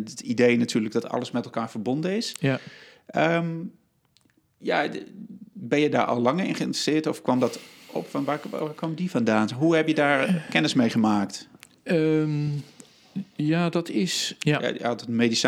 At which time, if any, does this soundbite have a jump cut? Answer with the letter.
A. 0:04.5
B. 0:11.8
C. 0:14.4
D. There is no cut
C